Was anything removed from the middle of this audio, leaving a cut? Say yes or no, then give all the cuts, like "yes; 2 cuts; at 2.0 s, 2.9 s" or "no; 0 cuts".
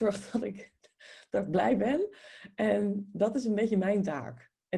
no; 0 cuts